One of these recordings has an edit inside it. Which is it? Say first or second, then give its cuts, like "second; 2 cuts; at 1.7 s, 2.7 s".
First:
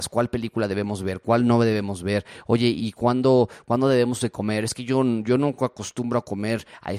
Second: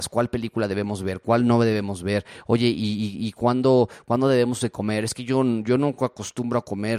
first; 1 cut; at 2.8 s